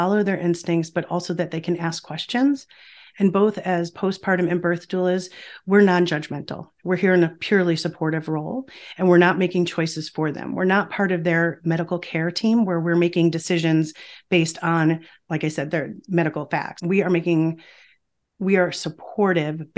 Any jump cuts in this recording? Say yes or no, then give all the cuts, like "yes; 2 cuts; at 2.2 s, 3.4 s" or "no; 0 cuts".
yes; 1 cut; at 16.8 s